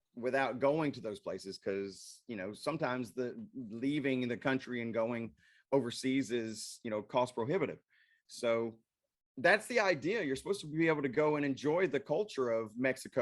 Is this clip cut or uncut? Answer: uncut